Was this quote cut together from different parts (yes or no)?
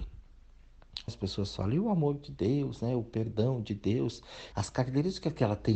yes